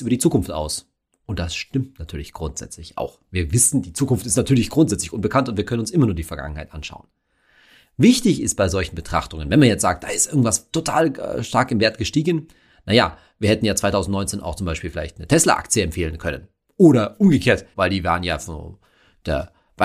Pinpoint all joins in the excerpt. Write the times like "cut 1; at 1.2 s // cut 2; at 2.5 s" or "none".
cut 1; at 17.7 s